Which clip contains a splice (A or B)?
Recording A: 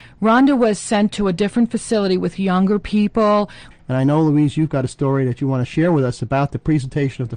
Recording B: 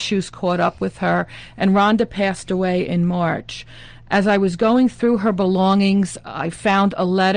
A